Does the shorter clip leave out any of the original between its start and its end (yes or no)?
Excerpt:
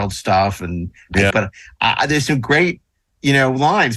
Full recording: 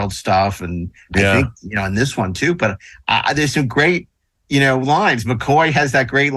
yes